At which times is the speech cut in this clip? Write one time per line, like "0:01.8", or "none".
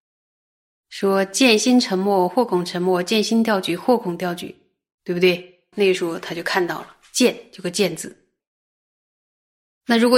0:05.7